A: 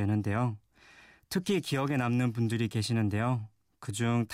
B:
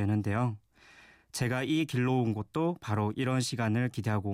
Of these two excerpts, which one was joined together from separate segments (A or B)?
A